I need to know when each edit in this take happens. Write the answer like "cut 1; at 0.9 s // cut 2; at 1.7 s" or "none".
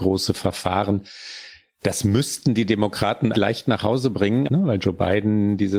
cut 1; at 3.3 s // cut 2; at 4.4 s